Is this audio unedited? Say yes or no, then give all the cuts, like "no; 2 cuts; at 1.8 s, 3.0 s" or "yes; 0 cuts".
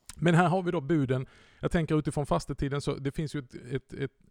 yes; 0 cuts